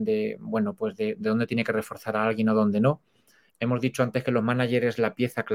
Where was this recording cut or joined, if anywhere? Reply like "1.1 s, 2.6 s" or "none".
3.5 s